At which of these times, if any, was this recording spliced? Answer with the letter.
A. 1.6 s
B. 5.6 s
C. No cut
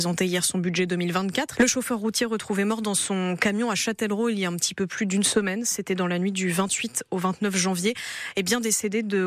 A